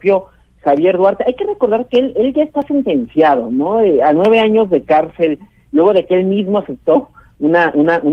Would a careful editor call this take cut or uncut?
uncut